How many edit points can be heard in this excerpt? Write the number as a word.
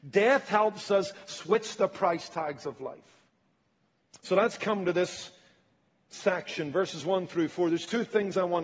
zero